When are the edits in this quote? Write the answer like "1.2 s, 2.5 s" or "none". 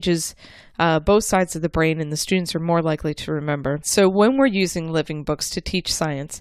3.8 s

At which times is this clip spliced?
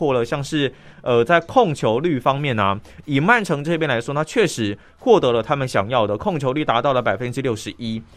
none

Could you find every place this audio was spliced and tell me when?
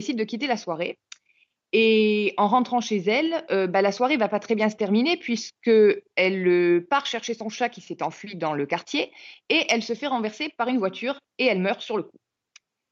none

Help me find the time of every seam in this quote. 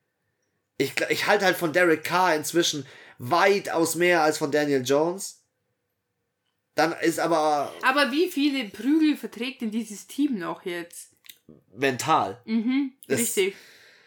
none

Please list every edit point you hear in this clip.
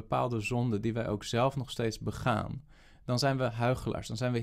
none

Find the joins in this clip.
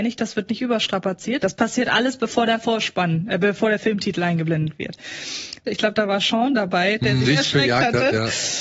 1.4 s, 5.6 s, 7.2 s

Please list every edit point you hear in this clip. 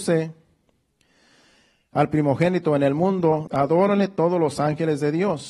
3.5 s

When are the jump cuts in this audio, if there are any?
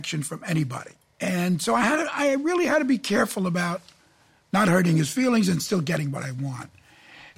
none

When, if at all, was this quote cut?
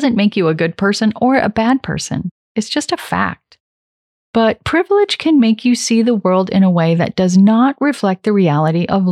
none

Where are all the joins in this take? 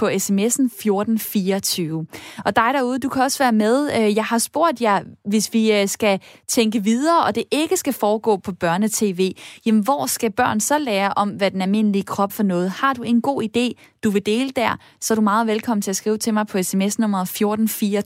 12.3 s

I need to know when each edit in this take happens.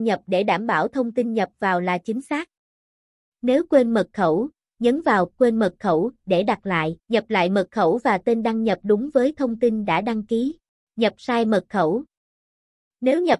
7.0 s, 10.8 s

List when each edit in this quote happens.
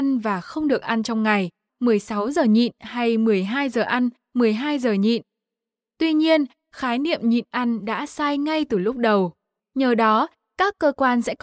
1.7 s, 9.6 s

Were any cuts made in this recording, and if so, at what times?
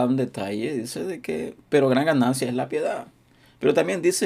1.6 s

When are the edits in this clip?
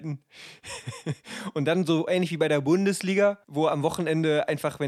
3.4 s

